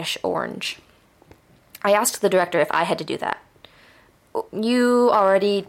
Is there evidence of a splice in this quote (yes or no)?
yes